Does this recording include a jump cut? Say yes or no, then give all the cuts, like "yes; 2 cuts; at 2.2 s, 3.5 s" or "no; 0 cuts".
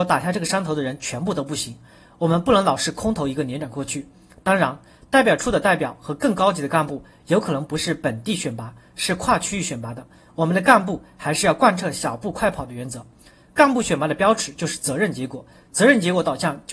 no; 0 cuts